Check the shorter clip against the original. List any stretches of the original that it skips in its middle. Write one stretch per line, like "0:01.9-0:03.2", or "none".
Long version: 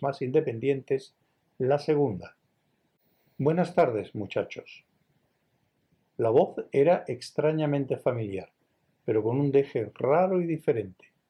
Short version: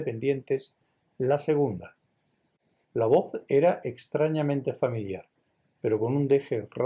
0:03.2-0:06.1